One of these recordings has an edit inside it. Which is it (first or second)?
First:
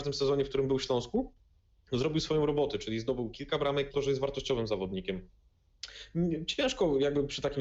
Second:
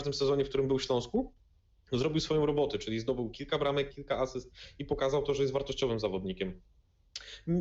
first